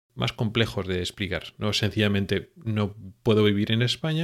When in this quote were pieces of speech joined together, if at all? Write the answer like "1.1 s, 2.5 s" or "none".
none